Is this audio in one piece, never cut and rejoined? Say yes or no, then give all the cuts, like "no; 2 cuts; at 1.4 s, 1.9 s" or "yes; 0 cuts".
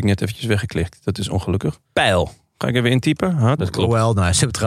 no; 2 cuts; at 1.8 s, 3.6 s